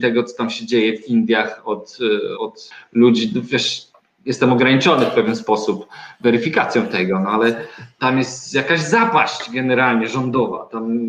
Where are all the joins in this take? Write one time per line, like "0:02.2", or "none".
0:02.3
0:08.0